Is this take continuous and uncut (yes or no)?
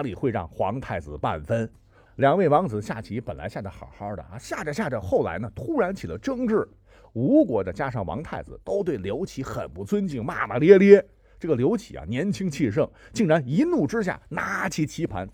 no